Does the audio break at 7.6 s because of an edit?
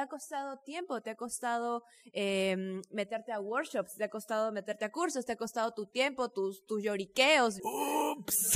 yes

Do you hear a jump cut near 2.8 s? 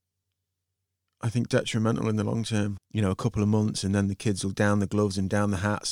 yes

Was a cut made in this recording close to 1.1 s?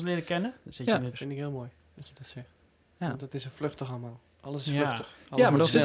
yes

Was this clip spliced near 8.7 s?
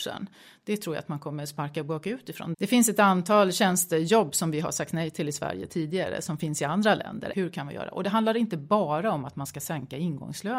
no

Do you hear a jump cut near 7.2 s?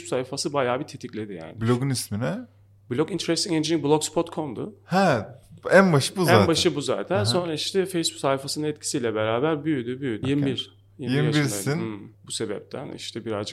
no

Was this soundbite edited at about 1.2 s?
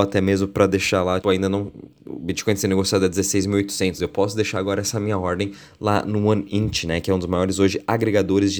yes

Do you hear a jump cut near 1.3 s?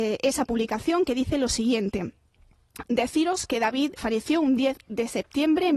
no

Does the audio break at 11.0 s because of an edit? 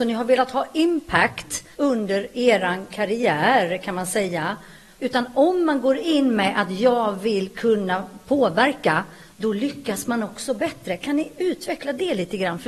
no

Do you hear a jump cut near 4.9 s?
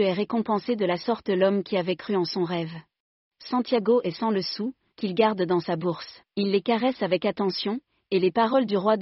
yes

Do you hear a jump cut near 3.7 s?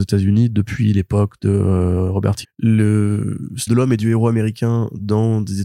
yes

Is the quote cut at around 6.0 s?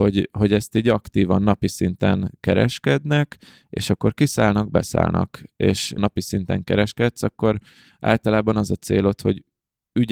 yes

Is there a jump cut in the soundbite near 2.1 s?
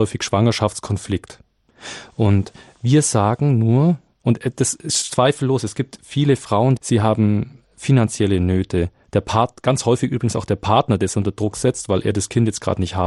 no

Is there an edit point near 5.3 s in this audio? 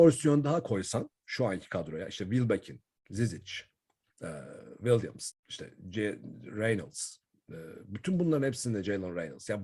yes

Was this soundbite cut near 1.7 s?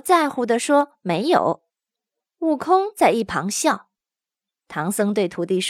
no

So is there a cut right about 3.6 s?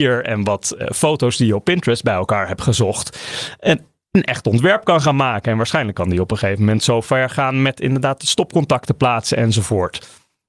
no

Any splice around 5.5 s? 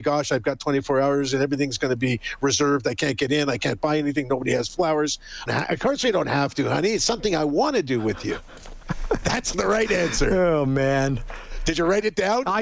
yes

